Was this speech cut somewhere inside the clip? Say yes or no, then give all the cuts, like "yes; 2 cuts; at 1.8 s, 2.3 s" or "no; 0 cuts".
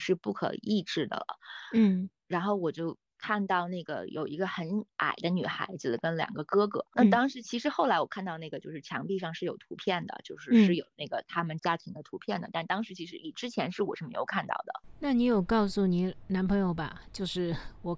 yes; 1 cut; at 11.6 s